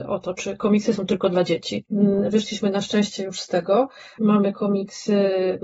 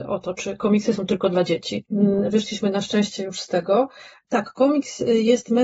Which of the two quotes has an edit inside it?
first; 1 cut; at 4.2 s

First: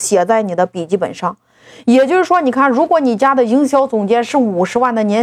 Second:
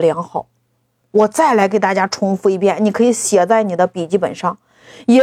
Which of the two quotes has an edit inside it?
second; 1 cut; at 1.0 s

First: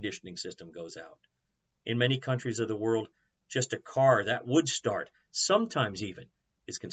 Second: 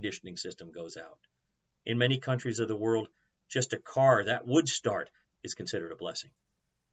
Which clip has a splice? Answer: second; 1 cut; at 5.2 s

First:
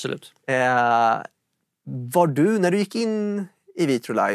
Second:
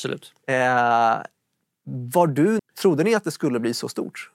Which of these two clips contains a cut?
second; 1 cut; at 2.6 s

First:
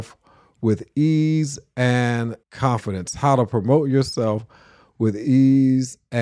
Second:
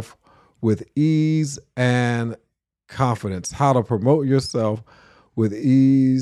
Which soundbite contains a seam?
first; 1 cut; at 2.4 s

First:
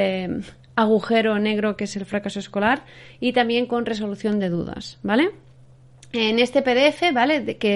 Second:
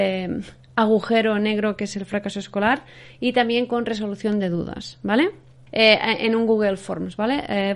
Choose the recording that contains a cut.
second; 1 cut; at 5.7 s

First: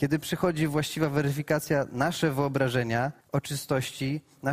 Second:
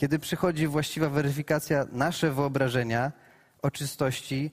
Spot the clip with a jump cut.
first; 1 cut; at 3.2 s

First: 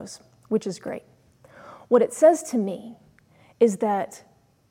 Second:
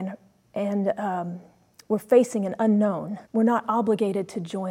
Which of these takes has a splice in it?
second; 1 cut; at 3.3 s

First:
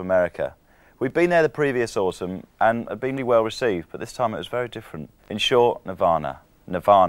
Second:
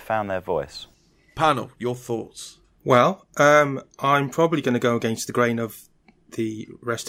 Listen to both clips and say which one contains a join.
first; 2 cuts; at 3.2 s, 5.2 s

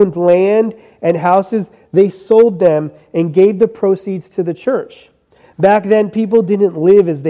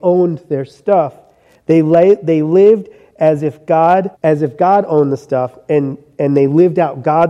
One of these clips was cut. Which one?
second; 1 cut; at 4.1 s

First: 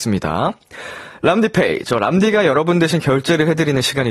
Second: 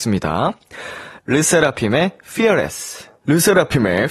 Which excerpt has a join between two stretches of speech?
second; 1 cut; at 1.2 s

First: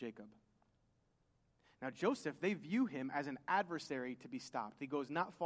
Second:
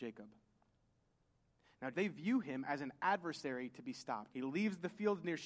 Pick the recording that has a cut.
second; 2 cuts; at 1.9 s, 4.3 s

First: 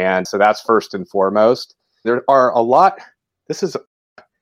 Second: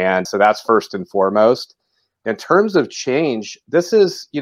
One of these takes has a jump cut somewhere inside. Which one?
first; 1 cut; at 2.0 s

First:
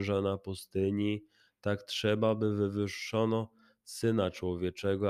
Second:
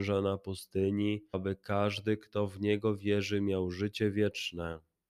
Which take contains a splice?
second; 1 cut; at 1.3 s

